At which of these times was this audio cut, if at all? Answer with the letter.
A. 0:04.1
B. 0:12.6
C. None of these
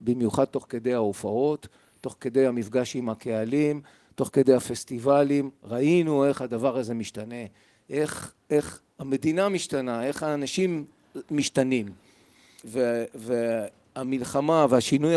B